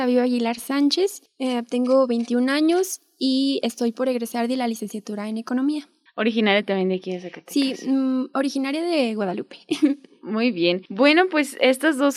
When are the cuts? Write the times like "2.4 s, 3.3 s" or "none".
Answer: none